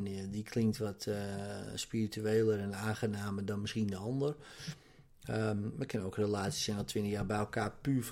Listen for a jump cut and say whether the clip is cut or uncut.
uncut